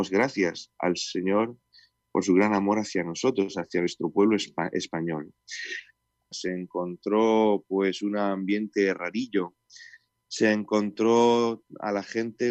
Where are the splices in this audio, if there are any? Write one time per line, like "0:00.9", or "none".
0:06.3